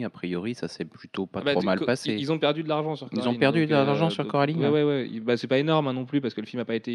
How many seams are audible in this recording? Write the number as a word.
zero